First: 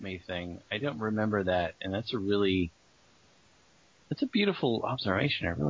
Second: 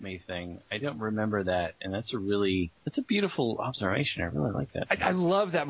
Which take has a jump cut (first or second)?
second